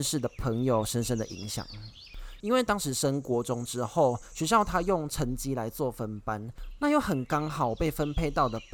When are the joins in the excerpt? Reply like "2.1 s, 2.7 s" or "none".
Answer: 2.4 s